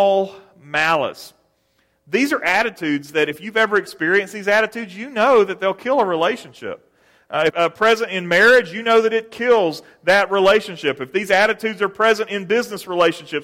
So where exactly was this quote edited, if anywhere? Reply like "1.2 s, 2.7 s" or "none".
7.5 s